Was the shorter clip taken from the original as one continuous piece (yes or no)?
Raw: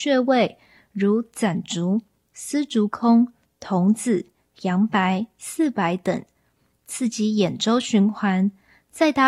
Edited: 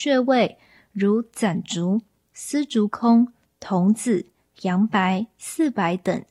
yes